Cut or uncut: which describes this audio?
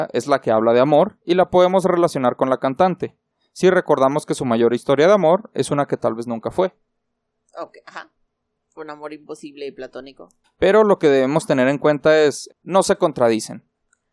cut